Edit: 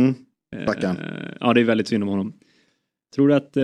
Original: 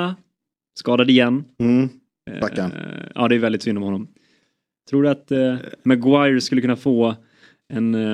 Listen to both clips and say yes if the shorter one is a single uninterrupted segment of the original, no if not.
yes